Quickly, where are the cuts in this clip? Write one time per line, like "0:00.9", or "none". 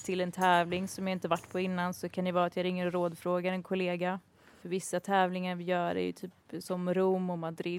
none